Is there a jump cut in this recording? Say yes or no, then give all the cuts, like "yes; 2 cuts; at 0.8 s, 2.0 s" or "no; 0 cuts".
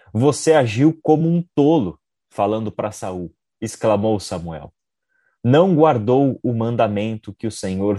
no; 0 cuts